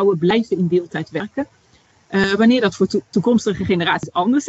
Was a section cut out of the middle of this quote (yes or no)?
yes